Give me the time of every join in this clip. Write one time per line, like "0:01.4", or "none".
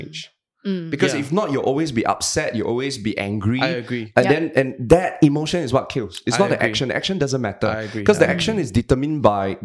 none